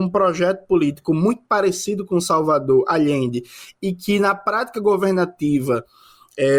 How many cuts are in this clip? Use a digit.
0